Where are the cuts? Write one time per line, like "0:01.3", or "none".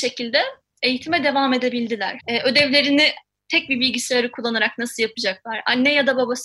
0:02.2